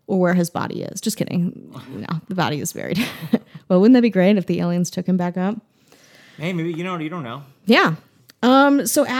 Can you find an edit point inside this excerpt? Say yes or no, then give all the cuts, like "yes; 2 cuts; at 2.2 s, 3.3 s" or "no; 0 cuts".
no; 0 cuts